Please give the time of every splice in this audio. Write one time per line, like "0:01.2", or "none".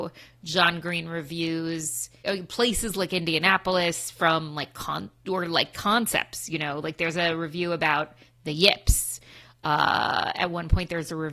none